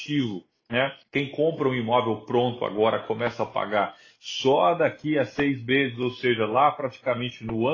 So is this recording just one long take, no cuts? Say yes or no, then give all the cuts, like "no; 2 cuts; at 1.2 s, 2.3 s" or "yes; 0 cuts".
no; 1 cut; at 1.0 s